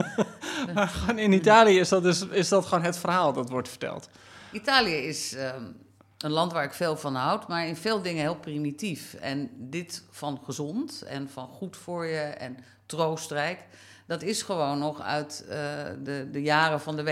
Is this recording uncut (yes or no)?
yes